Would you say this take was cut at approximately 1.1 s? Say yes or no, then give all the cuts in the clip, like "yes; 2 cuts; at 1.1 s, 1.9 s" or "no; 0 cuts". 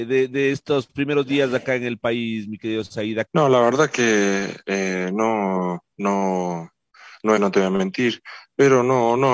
no; 3 cuts; at 3.3 s, 5.9 s, 7.4 s